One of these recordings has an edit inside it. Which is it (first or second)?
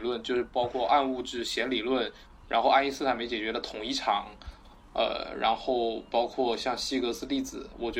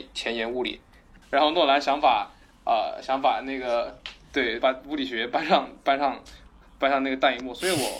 second